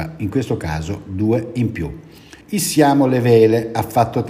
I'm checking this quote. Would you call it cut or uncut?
cut